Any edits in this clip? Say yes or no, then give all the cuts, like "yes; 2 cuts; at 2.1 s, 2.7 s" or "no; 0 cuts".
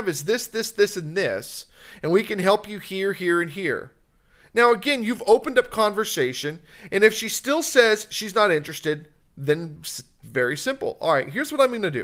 no; 0 cuts